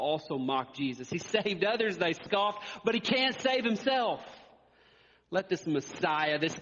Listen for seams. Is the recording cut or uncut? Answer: uncut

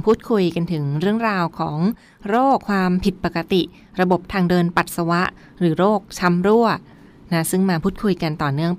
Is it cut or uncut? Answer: cut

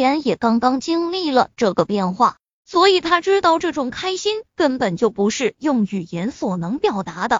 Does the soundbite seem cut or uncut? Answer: uncut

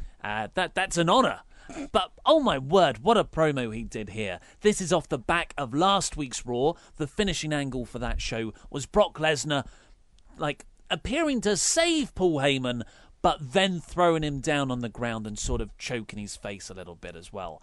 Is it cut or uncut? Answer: uncut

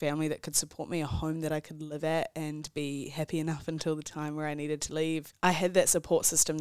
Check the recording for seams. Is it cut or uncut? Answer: uncut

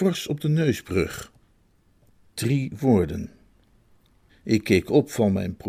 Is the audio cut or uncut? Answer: cut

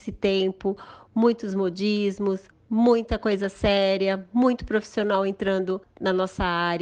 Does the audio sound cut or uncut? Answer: uncut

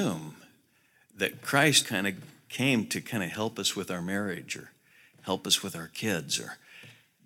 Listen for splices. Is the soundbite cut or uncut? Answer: cut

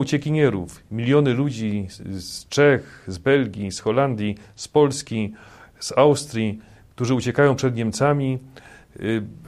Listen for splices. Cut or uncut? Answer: uncut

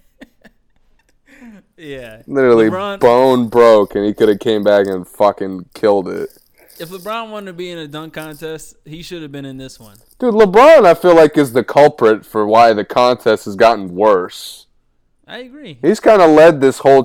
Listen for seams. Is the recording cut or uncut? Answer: uncut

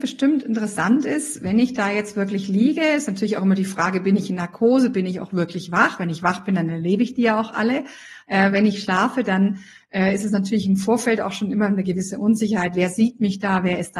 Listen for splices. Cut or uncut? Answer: uncut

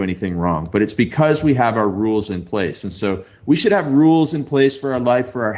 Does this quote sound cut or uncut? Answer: uncut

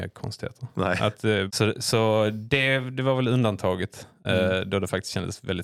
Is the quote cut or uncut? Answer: cut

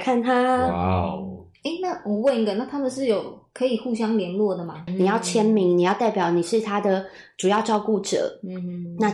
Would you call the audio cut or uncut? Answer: cut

